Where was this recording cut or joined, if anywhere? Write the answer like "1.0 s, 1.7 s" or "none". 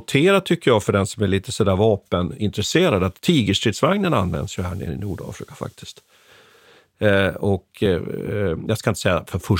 none

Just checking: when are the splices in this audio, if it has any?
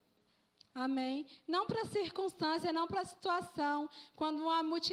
none

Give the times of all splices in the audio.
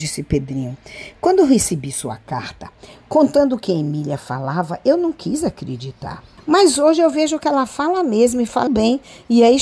8.7 s

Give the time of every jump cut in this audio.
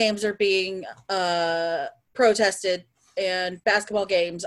none

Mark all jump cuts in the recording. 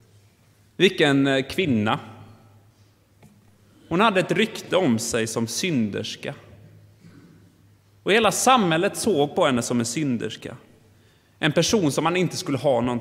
none

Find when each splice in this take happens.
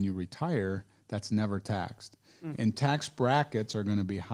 2.5 s

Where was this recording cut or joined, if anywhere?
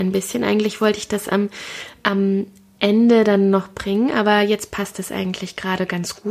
none

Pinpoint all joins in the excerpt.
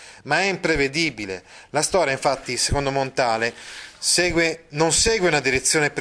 none

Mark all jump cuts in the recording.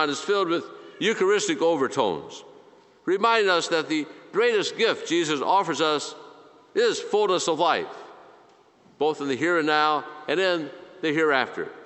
none

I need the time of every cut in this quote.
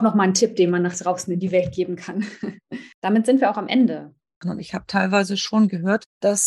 2.9 s, 4.4 s

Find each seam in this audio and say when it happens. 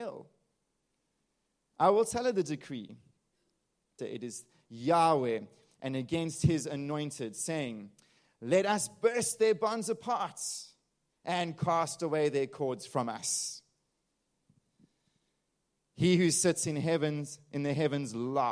4.0 s

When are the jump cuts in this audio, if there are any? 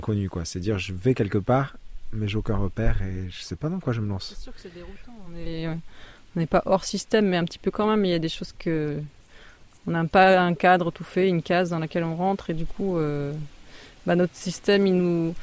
none

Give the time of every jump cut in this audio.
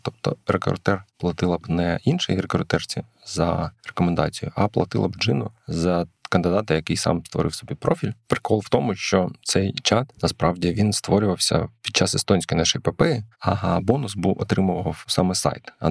10.1 s, 13.3 s

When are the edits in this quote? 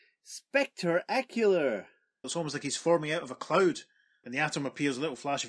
2.2 s

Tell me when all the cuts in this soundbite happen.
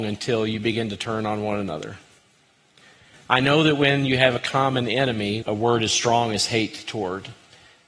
5.4 s

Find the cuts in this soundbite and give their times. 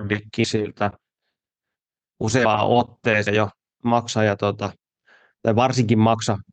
3.8 s

